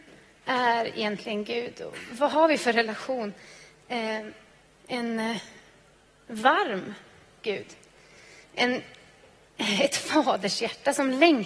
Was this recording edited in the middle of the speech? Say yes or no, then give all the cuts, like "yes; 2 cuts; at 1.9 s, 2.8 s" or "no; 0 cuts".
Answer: yes; 2 cuts; at 4.7 s, 8.4 s